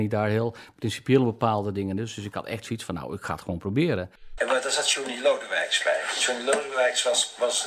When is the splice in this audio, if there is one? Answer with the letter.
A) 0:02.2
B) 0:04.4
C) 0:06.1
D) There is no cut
B